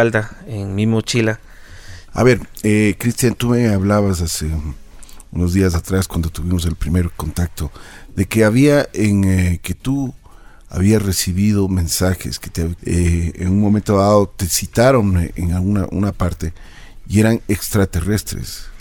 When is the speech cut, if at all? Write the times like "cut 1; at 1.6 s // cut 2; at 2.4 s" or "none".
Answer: cut 1; at 2.1 s // cut 2; at 12.8 s